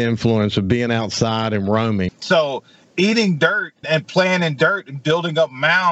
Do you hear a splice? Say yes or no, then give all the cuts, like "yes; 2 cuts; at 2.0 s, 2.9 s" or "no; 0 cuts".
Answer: yes; 2 cuts; at 2.1 s, 3.8 s